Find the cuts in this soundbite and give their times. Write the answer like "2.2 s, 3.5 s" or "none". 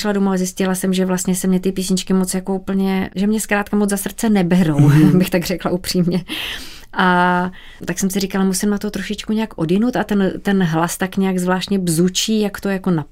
none